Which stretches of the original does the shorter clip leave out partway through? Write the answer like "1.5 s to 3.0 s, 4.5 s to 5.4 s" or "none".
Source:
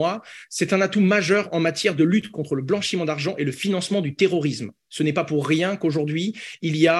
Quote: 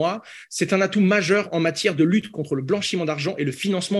none